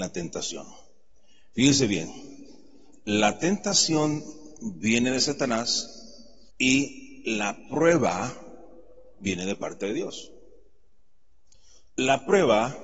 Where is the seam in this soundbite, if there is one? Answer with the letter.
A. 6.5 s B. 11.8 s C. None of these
A